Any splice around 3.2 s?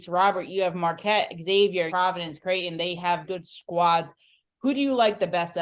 yes; 2 cuts; at 1.9 s, 3.2 s

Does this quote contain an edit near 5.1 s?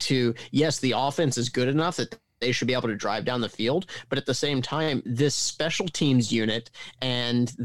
yes; 1 cut; at 5.1 s

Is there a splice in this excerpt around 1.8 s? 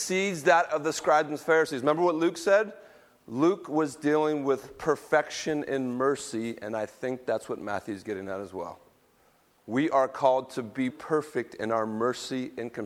no; 2 cuts; at 9.6 s, 10.9 s

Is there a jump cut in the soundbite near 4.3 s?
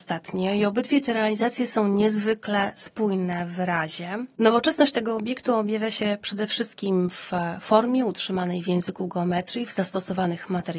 no; 0 cuts

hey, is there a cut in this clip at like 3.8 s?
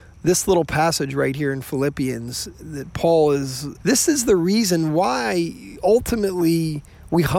yes; 1 cut; at 3.8 s

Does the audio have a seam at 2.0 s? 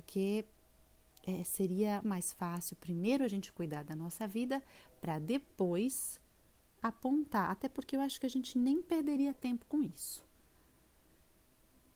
yes; 1 cut; at 2.0 s

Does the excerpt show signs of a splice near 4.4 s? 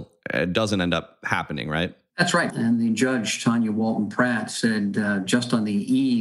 no; 1 cut; at 2.5 s

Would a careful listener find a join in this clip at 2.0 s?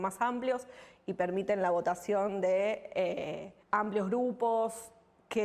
no; 1 cut; at 3.6 s

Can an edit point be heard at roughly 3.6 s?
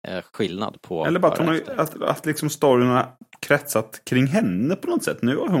no; 1 cut; at 1.9 s

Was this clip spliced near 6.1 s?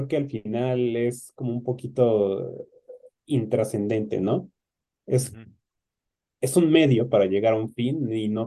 no; 0 cuts

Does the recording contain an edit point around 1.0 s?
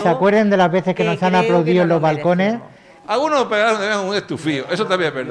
no; 1 cut; at 3.0 s

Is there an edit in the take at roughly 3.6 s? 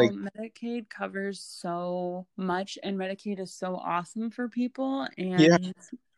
no; 1 cut; at 2.3 s

